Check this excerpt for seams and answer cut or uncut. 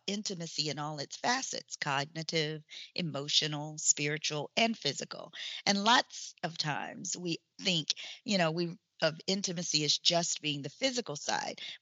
uncut